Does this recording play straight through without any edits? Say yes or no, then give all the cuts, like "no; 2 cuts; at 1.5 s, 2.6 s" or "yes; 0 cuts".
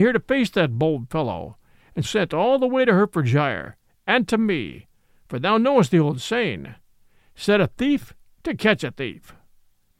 no; 1 cut; at 2.0 s